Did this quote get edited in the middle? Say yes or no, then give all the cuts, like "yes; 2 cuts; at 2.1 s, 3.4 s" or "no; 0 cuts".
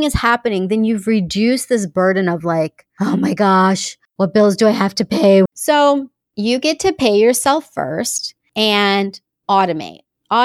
yes; 1 cut; at 5.5 s